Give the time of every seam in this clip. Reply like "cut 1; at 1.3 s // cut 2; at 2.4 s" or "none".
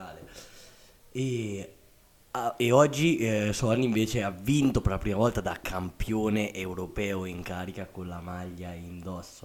none

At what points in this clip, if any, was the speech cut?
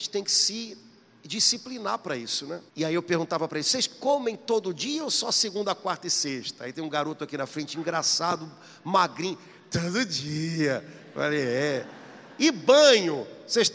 cut 1; at 2.7 s

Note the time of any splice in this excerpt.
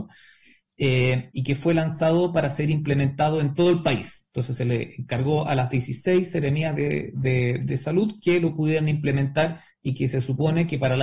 none

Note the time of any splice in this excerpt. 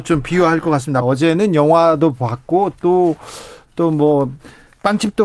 cut 1; at 1.0 s

